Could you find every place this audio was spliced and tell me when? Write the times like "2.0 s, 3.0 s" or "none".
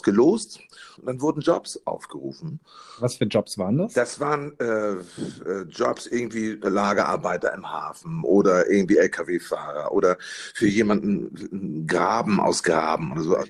1.0 s